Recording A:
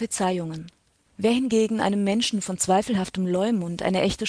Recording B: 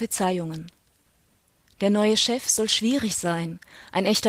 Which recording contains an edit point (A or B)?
A